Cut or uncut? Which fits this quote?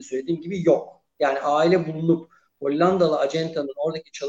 uncut